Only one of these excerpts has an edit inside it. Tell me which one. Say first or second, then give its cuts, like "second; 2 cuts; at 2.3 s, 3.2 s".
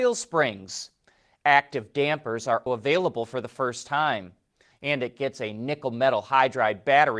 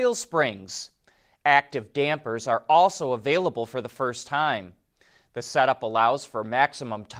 first; 2 cuts; at 2.7 s, 4.7 s